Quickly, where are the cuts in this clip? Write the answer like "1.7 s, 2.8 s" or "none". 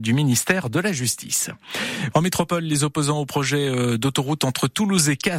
2.1 s